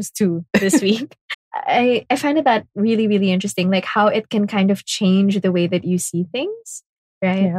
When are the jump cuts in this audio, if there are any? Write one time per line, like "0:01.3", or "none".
0:01.3